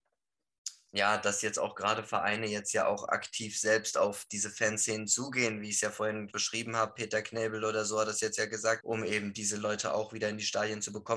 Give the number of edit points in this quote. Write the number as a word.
two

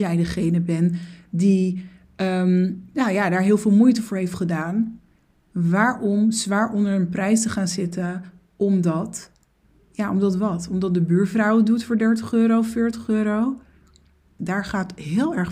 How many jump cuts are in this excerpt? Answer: one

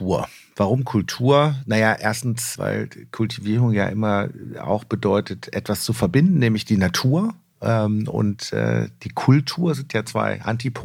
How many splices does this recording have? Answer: one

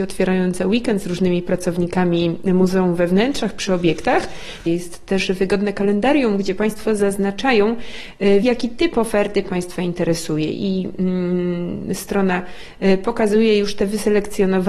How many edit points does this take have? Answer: two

